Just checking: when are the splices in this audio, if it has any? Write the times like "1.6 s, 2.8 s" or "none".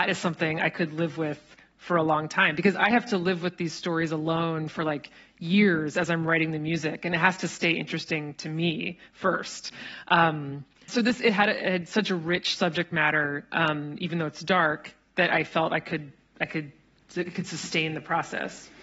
10.9 s